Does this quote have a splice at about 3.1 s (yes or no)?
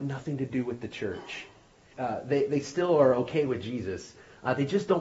no